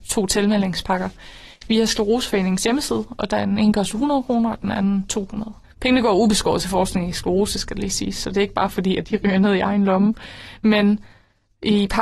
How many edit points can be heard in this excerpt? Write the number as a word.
two